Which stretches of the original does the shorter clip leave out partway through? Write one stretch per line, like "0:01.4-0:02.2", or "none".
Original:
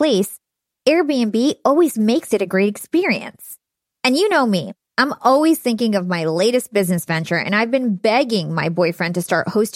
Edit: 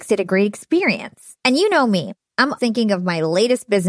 0:03.6-0:04.0
0:05.2-0:05.6